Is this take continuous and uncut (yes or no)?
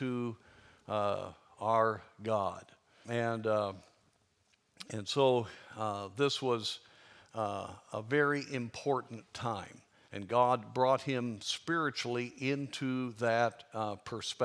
no